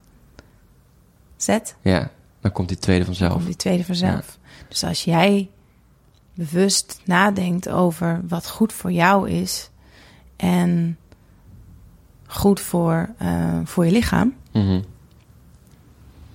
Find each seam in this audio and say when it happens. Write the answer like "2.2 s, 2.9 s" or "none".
none